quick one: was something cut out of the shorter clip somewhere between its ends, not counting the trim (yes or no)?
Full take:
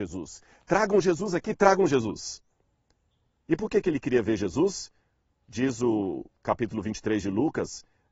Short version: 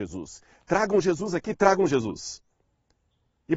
no